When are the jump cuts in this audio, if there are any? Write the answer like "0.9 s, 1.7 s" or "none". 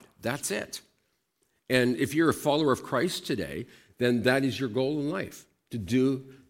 none